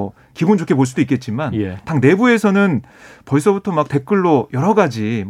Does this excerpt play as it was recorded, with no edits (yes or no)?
yes